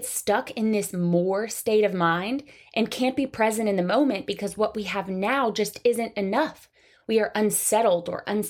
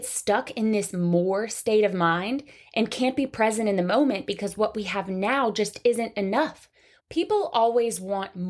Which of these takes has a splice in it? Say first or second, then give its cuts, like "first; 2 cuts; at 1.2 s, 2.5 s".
second; 1 cut; at 7.0 s